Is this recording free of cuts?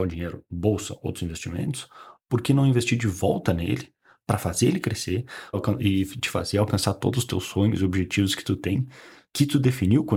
no; 1 cut; at 5.5 s

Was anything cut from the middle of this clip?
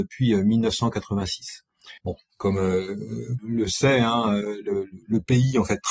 yes; 2 cuts; at 2.0 s, 3.4 s

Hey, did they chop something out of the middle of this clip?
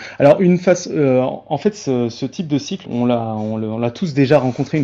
yes; 1 cut; at 2.8 s

